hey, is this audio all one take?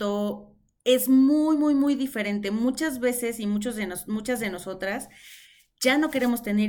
yes; 0 cuts

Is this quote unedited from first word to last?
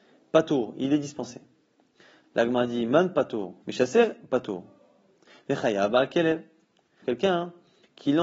no; 2 cuts; at 3.6 s, 7.0 s

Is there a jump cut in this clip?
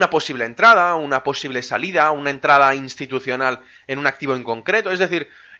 no; 0 cuts

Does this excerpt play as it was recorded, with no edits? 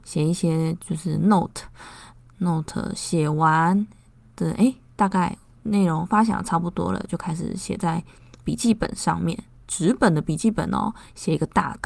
yes; 0 cuts

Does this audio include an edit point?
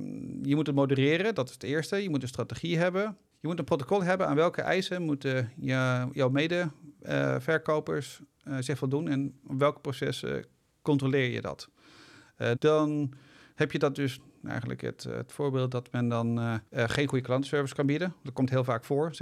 yes; 3 cuts; at 12.6 s, 14.5 s, 16.7 s

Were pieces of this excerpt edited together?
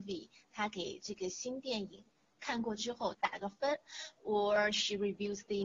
yes; 1 cut; at 3.1 s

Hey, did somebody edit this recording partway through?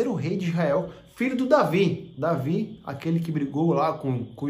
no; 0 cuts

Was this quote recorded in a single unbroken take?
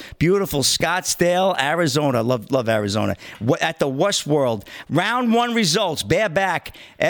no; 1 cut; at 4.8 s

